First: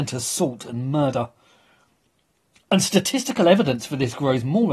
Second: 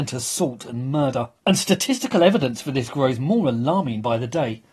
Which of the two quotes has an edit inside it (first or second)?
second